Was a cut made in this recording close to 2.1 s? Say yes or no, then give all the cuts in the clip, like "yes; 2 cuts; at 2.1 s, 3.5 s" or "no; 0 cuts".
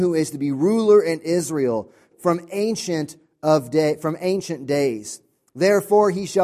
yes; 1 cut; at 2.1 s